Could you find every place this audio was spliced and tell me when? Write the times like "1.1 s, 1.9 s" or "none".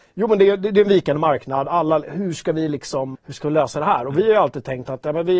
3.1 s